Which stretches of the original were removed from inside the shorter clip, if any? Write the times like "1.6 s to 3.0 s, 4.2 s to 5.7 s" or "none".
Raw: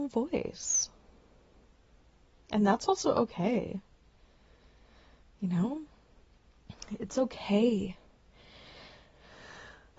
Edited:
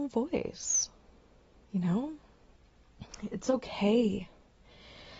1.6 s to 5.3 s